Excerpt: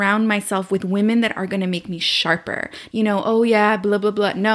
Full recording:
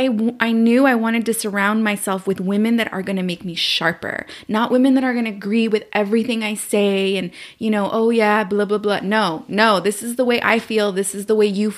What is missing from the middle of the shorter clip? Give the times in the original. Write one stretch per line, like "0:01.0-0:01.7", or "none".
0:04.4-0:07.6